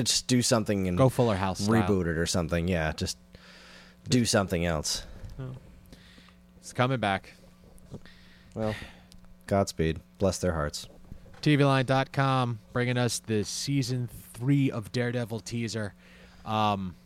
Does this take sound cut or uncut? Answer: cut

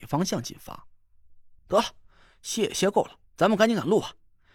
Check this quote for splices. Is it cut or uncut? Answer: cut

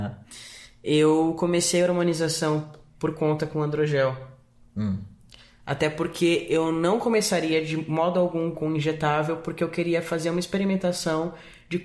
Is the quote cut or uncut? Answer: cut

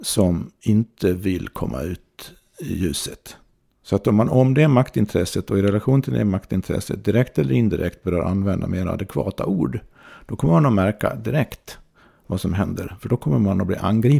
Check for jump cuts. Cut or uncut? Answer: uncut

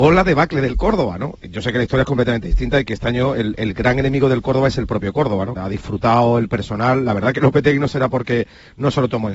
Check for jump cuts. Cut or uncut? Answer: cut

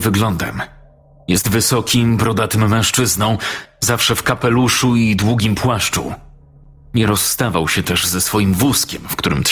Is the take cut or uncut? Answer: uncut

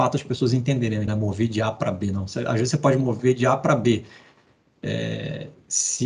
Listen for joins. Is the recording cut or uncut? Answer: cut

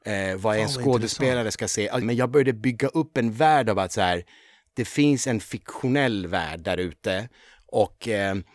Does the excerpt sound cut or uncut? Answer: cut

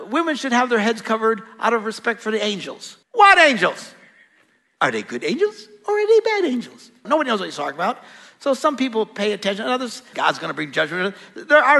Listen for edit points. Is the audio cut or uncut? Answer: cut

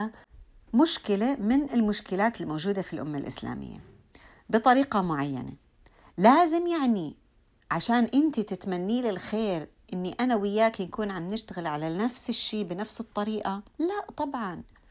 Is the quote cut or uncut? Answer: cut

